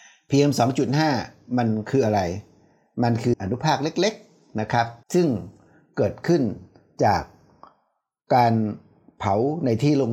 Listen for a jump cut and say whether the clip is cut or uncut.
cut